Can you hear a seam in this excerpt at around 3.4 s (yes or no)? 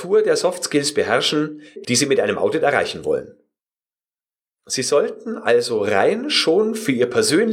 no